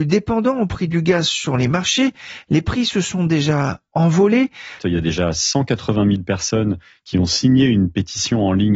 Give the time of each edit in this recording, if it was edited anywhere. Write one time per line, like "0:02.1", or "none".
0:04.8